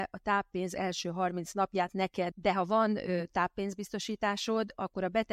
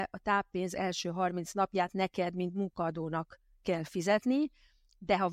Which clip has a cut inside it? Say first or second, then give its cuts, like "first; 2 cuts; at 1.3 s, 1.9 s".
first; 1 cut; at 2.3 s